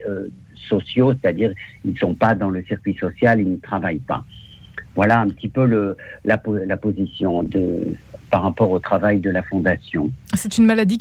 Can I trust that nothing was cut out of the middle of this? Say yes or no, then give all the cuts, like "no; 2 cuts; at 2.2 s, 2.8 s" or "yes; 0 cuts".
no; 1 cut; at 7.5 s